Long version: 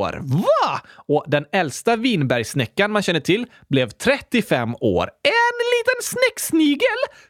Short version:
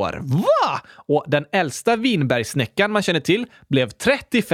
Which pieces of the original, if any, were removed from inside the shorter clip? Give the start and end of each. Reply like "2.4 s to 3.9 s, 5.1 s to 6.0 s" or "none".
none